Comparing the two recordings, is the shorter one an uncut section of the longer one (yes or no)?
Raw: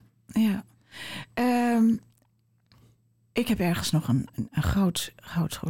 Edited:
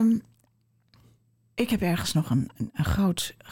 yes